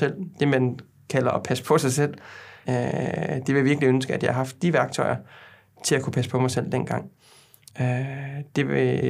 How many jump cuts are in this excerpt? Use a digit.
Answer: 2